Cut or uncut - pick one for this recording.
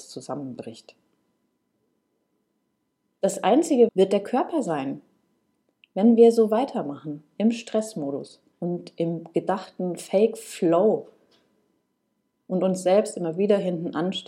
cut